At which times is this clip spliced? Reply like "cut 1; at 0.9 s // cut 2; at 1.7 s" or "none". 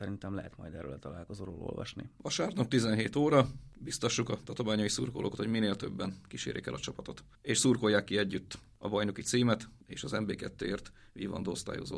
none